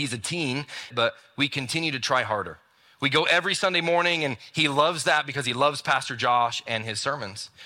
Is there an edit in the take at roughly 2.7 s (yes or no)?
no